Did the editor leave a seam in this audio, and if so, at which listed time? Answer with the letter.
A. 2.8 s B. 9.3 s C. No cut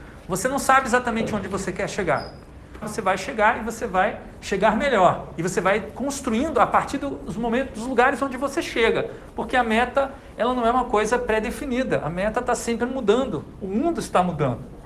A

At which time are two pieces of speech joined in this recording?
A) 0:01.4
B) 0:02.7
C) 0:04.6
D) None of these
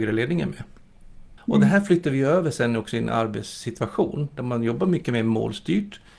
A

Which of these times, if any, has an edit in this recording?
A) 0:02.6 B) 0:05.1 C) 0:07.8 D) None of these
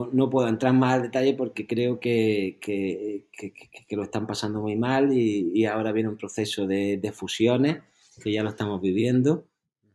D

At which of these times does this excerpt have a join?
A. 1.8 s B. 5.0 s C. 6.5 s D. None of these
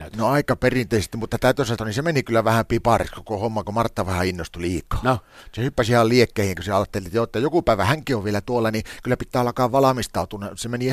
A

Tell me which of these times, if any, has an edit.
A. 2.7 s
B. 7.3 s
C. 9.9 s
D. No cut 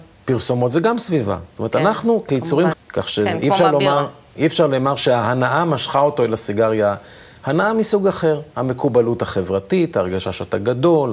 A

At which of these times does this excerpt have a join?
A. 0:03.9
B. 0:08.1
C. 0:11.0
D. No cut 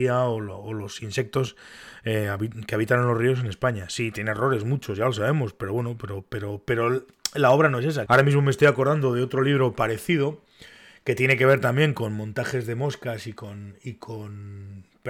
B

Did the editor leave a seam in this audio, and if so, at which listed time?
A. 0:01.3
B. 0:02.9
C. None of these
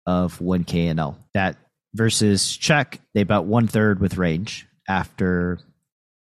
A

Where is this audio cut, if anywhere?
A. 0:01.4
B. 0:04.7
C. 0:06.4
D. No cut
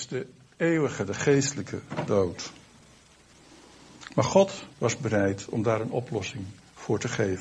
B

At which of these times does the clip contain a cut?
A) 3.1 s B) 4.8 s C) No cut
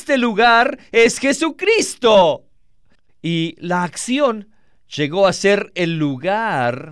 A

